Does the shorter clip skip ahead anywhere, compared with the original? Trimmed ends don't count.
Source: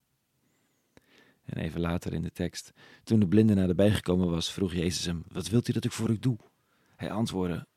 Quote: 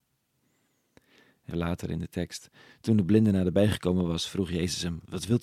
yes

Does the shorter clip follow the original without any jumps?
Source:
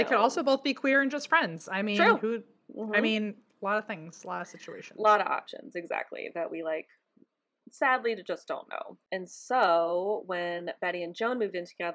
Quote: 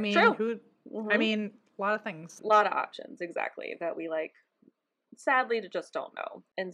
no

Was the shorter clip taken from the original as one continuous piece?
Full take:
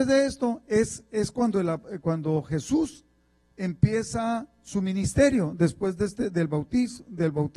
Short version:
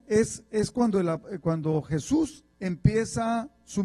no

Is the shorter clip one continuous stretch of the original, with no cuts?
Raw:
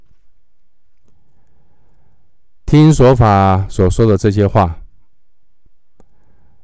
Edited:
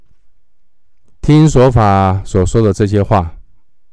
no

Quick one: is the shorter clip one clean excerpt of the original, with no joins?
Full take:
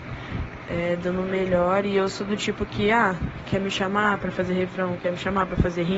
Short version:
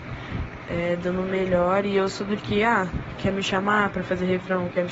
no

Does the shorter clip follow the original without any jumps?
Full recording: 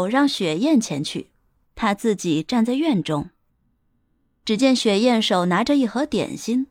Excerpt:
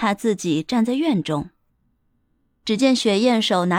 yes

